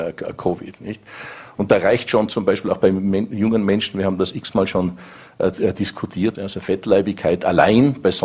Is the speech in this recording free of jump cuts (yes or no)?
no